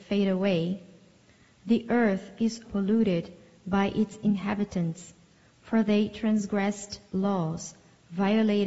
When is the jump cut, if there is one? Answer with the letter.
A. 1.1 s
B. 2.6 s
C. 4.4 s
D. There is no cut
B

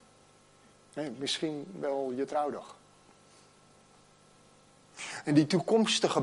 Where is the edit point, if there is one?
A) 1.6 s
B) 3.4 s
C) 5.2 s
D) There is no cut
C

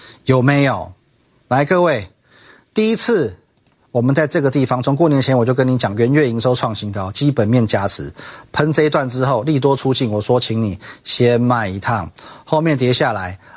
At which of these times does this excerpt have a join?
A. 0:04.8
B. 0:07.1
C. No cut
C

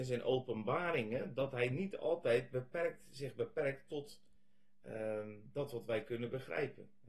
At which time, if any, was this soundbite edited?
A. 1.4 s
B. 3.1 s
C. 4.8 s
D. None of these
D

